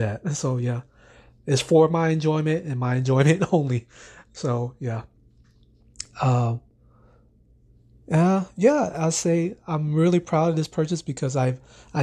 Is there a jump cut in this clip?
no; 0 cuts

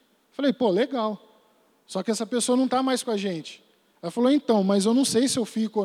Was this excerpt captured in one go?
yes; 0 cuts

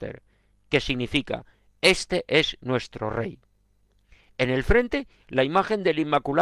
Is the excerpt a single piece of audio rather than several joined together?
yes; 0 cuts

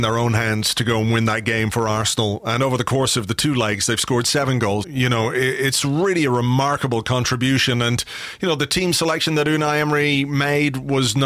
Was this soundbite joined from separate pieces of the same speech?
yes; 1 cut; at 4.8 s

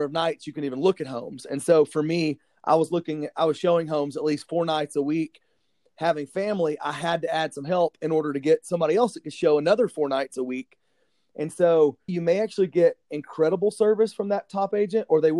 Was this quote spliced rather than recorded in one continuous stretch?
yes; 1 cut; at 12.1 s

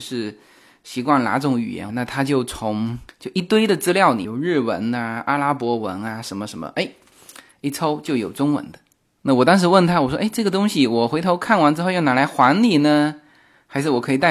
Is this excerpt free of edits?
no; 1 cut; at 1.9 s

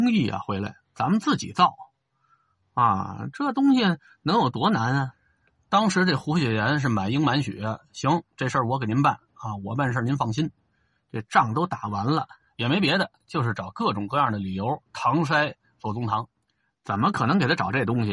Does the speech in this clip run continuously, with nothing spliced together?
no; 2 cuts; at 12.4 s, 14.9 s

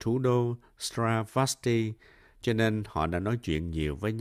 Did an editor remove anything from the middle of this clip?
no; 0 cuts

